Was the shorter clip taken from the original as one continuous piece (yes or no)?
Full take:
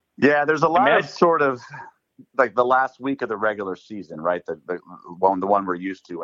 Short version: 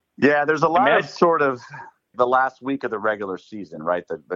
no